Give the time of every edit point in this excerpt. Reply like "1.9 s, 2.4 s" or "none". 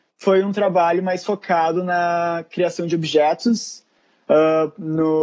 none